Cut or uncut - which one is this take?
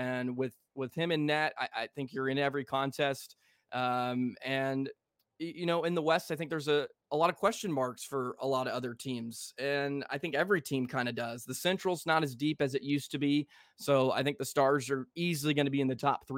uncut